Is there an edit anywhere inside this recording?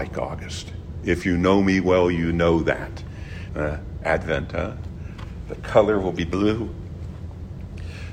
yes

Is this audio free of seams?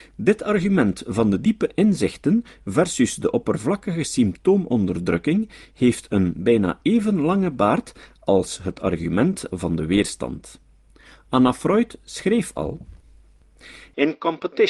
yes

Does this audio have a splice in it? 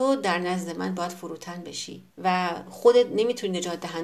yes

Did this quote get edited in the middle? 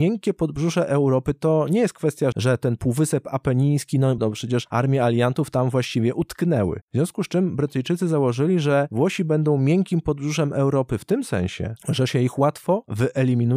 yes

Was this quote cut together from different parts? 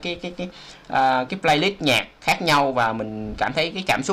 yes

